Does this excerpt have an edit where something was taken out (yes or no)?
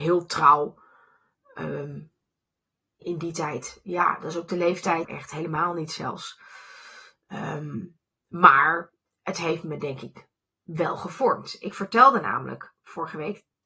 yes